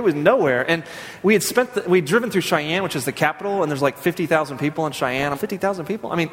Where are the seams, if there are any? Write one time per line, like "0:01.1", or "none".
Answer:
0:05.3